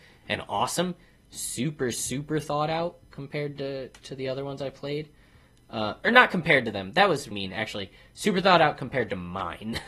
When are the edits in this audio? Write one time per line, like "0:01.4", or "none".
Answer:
0:07.3